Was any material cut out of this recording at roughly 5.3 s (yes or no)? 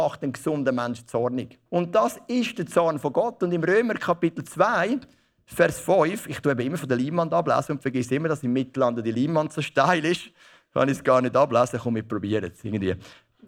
no